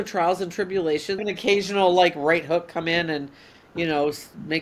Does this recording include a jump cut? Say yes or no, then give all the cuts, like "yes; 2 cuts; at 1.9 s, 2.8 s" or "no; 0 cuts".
yes; 1 cut; at 1.2 s